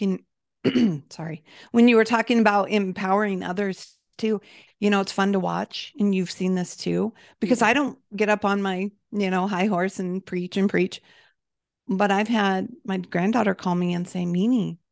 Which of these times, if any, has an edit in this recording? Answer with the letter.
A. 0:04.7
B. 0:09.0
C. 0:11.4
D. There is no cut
A